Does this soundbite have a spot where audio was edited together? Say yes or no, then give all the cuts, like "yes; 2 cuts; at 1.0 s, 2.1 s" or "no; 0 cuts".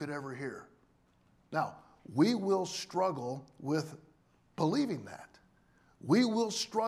no; 0 cuts